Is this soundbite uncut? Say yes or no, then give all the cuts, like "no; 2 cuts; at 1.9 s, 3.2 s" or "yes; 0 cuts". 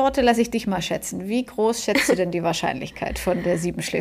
yes; 0 cuts